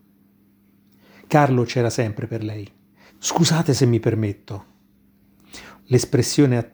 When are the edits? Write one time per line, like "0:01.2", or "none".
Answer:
0:03.1
0:05.8